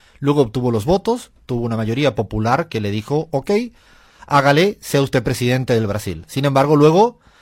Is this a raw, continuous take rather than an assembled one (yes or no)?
yes